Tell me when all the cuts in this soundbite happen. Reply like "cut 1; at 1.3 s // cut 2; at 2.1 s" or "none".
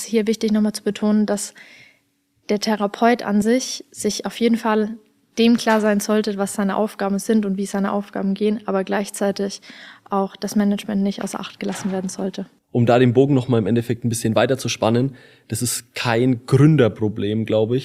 none